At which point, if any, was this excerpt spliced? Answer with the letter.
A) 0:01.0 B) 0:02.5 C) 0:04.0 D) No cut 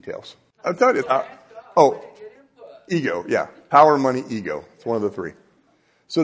A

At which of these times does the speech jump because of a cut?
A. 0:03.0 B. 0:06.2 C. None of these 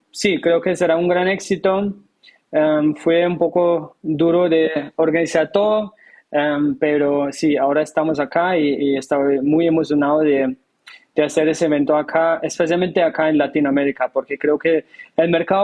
C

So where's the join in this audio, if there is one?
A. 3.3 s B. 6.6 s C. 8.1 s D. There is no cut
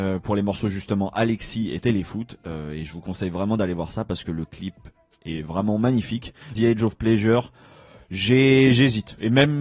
B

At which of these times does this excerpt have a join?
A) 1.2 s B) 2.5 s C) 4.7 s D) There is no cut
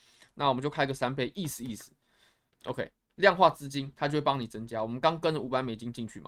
B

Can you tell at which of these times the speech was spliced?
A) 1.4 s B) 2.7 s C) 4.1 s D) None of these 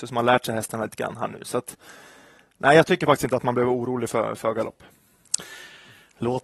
D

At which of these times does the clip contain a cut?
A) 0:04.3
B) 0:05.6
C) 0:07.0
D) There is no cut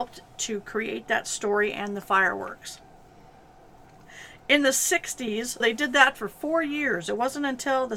B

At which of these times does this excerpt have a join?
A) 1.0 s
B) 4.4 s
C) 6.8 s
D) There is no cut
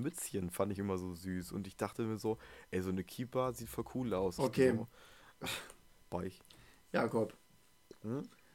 B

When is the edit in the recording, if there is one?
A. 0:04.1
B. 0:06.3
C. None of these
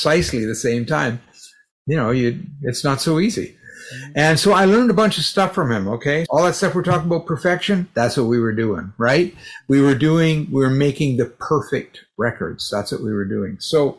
B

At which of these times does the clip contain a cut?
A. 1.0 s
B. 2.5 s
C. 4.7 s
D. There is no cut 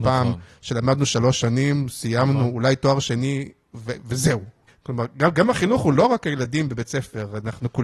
C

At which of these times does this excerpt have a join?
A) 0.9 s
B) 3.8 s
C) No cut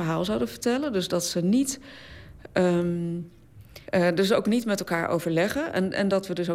B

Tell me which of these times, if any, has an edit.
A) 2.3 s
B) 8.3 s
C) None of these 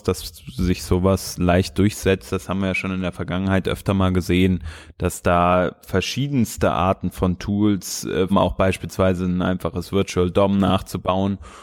B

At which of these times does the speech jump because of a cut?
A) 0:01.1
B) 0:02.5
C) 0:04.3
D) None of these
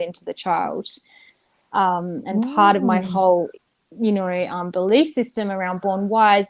D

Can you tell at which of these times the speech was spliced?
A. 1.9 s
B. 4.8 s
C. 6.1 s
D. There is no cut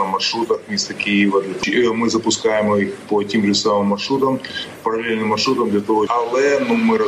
C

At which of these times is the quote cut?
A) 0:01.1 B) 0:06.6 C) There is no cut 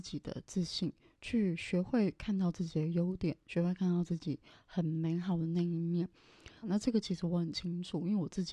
B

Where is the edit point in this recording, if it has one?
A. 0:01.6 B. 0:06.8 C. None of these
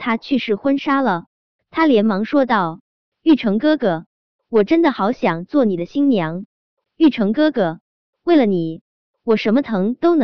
B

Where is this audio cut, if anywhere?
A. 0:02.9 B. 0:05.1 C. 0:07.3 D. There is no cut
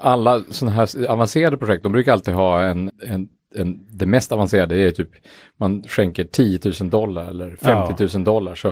A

